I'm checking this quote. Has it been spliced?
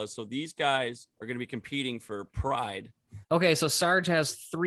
yes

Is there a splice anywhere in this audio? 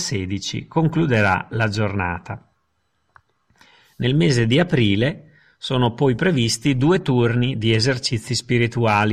no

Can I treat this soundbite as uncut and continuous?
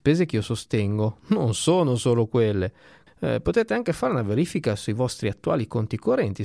no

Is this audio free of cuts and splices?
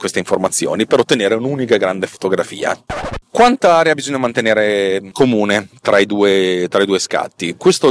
yes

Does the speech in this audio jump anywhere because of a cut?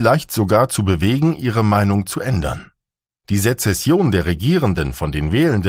yes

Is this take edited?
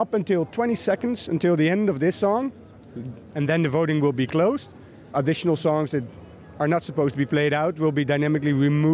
yes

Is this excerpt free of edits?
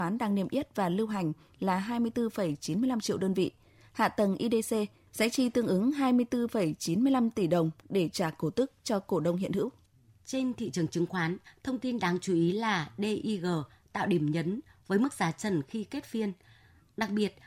yes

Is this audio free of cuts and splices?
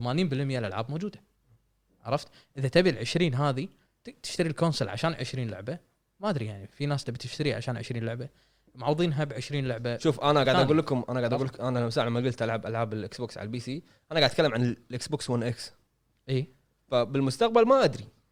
yes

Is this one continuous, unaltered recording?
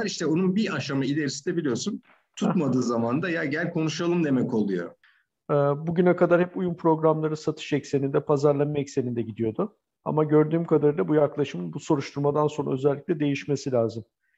yes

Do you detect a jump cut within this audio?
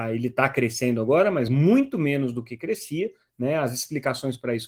no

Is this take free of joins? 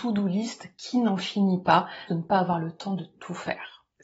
no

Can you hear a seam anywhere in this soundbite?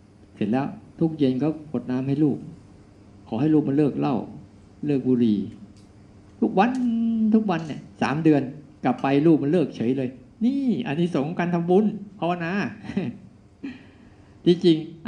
no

